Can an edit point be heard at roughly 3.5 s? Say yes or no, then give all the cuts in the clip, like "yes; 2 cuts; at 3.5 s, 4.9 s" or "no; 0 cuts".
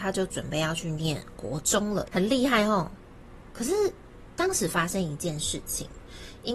no; 1 cut; at 2.1 s